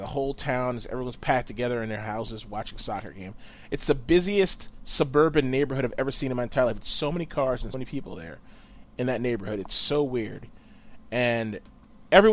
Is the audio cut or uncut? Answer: cut